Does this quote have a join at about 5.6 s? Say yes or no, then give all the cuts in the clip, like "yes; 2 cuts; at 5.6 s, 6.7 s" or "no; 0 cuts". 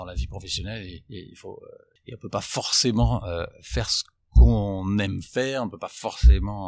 no; 1 cut; at 2.0 s